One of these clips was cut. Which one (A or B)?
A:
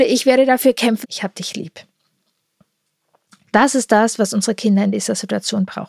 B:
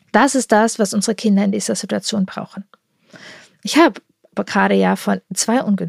A